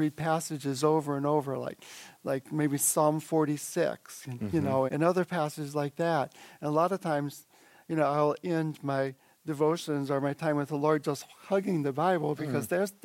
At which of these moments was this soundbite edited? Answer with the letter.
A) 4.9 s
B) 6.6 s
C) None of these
A